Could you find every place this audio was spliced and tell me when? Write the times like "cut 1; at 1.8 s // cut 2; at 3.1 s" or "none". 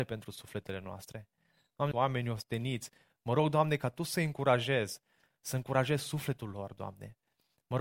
cut 1; at 1.9 s // cut 2; at 5.3 s